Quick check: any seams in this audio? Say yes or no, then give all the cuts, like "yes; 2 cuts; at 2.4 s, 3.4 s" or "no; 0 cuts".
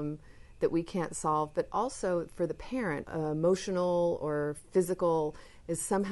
yes; 1 cut; at 3.0 s